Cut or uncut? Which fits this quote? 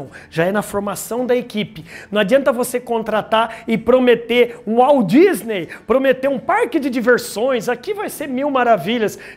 uncut